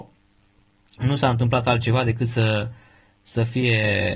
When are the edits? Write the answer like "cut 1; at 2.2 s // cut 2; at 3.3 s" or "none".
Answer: none